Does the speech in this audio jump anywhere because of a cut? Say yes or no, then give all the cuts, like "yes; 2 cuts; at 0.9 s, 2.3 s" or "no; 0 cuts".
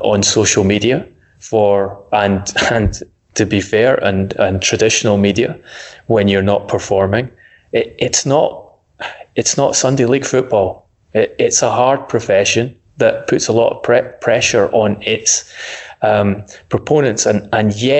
no; 0 cuts